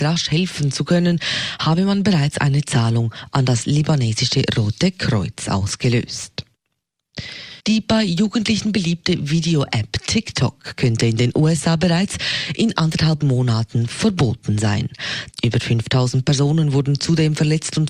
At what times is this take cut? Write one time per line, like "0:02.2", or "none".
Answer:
0:07.6
0:15.3